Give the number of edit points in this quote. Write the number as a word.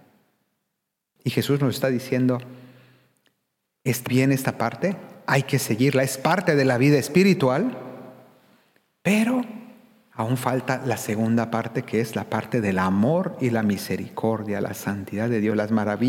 two